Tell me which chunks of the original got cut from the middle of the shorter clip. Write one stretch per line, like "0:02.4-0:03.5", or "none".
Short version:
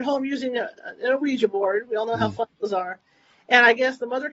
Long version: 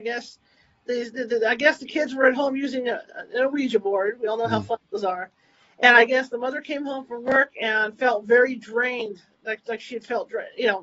none